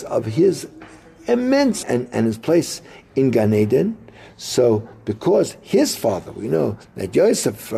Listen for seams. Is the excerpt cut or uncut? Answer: cut